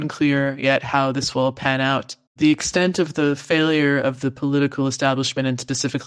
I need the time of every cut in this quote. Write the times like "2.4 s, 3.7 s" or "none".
2.3 s

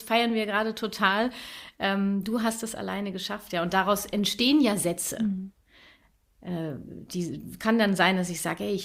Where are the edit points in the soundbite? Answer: none

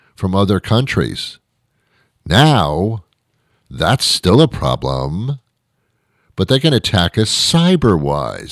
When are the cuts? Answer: none

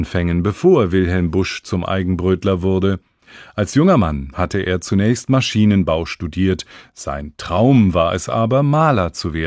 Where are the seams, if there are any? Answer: none

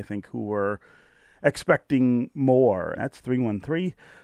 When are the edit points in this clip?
3.0 s

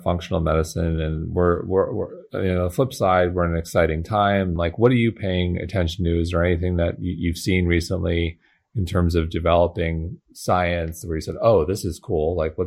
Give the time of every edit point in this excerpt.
4.6 s

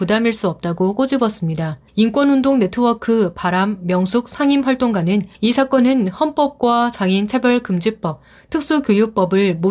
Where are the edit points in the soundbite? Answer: 1.9 s, 5.3 s

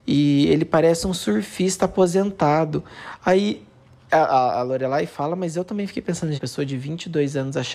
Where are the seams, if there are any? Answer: 6.4 s

